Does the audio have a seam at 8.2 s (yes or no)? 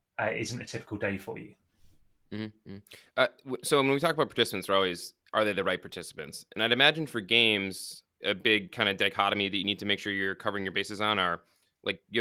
yes